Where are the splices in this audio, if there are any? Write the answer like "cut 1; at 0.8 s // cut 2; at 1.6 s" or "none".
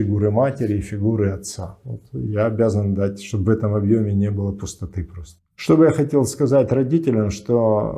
cut 1; at 5.5 s